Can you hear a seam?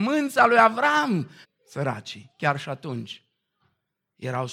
yes; 1 cut; at 1.4 s

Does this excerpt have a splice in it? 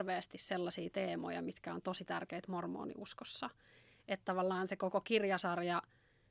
no; 0 cuts

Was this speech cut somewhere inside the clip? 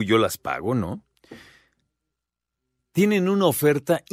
no; 0 cuts

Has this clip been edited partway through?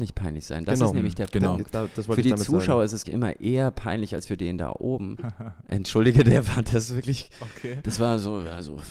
yes; 2 cuts; at 3.0 s, 5.2 s

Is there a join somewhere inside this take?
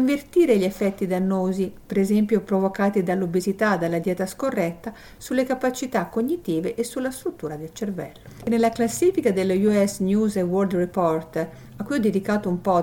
no; 0 cuts

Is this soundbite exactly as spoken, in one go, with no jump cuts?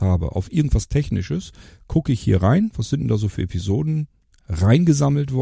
yes; 0 cuts

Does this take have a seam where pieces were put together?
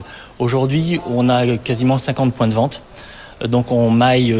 no; 0 cuts

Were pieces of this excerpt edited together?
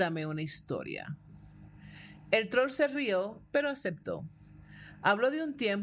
no; 0 cuts

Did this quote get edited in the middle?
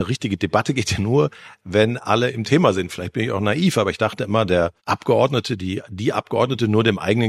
yes; 1 cut; at 4.8 s

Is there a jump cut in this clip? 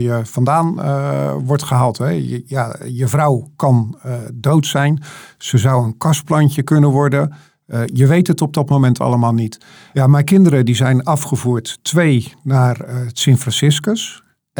no; 0 cuts

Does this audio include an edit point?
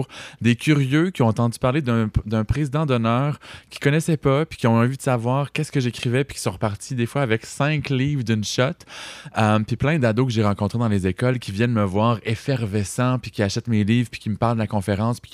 no; 0 cuts

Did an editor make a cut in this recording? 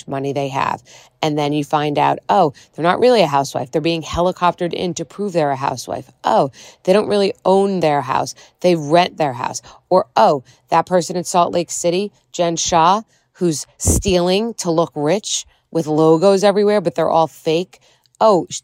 no; 0 cuts

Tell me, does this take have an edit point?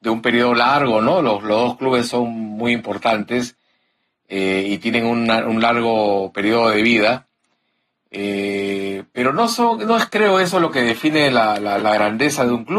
no; 0 cuts

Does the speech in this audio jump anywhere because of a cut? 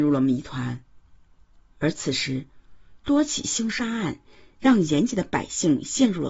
no; 0 cuts

